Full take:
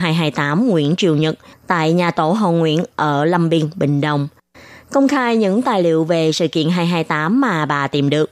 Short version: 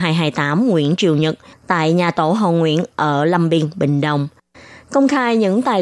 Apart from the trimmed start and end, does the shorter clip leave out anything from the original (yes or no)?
no